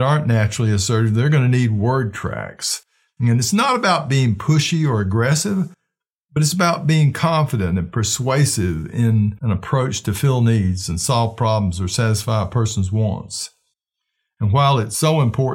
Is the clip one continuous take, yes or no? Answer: yes